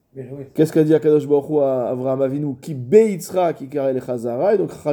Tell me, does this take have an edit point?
no; 0 cuts

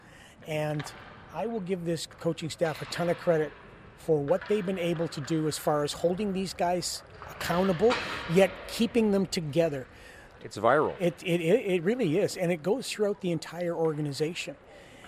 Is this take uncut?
no; 1 cut; at 10.4 s

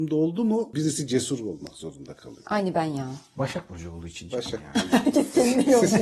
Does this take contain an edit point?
no; 0 cuts

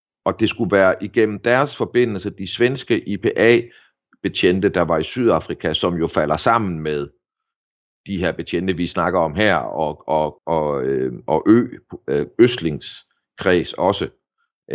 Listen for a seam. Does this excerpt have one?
yes; 1 cut; at 10.4 s

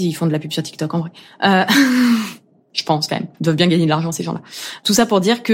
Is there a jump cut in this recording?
yes; 1 cut; at 3.3 s

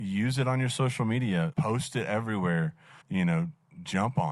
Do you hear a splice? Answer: yes; 2 cuts; at 1.5 s, 3.0 s

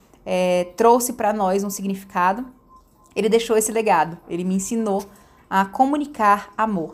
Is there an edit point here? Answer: no; 0 cuts

